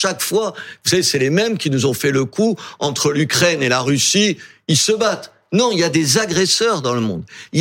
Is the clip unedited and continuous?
yes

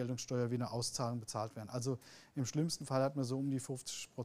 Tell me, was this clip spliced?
no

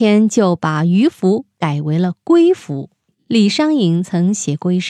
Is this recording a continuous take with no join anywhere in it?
yes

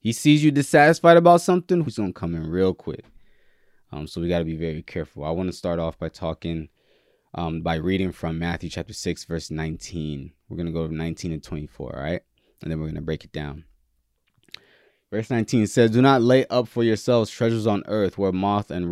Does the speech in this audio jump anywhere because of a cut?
yes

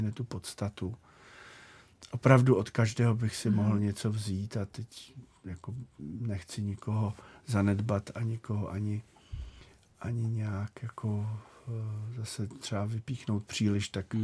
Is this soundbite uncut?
yes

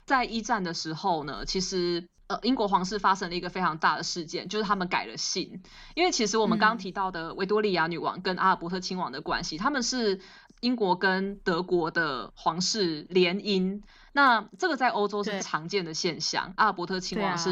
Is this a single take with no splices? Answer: no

